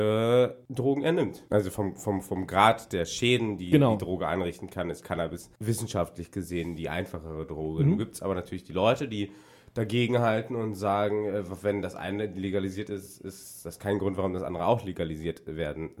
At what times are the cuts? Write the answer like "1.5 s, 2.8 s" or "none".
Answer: 1.5 s